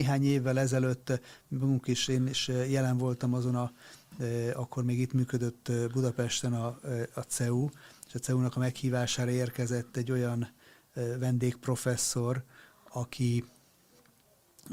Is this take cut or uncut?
uncut